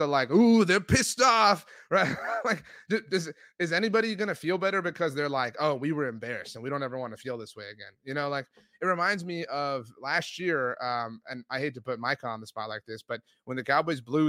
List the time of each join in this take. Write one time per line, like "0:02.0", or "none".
none